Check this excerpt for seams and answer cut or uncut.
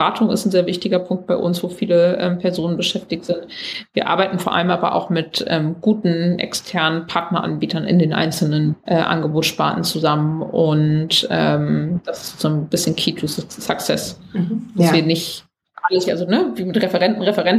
cut